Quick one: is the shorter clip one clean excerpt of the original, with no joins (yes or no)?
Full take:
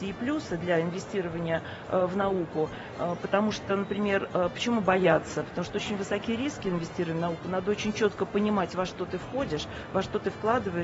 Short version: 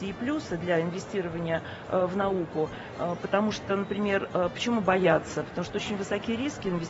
yes